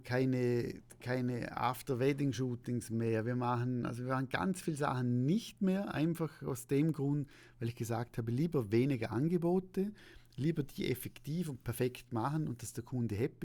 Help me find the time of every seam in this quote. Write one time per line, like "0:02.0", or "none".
none